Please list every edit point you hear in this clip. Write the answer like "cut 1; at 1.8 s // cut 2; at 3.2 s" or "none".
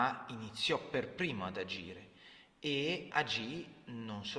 cut 1; at 3.1 s